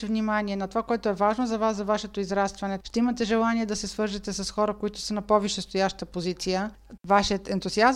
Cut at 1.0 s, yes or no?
no